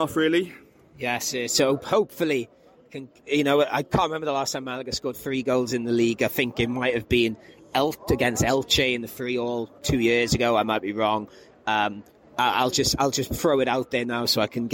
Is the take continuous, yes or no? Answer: yes